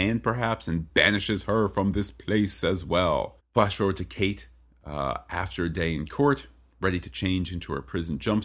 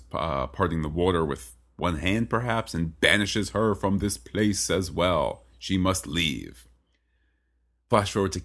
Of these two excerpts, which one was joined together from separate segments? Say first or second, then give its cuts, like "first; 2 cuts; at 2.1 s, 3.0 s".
first; 1 cut; at 3.4 s